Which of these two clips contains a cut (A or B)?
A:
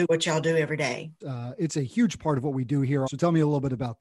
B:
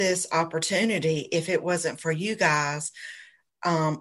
A